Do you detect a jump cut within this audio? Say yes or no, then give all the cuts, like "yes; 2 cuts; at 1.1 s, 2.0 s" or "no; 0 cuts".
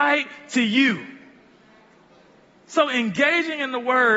no; 0 cuts